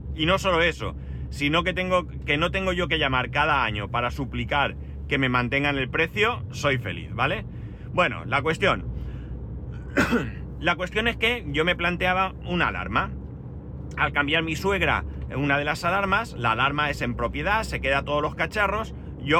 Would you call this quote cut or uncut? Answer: uncut